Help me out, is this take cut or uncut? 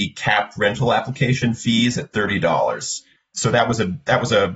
cut